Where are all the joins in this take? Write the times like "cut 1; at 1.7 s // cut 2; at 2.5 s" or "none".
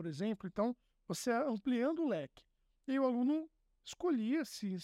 none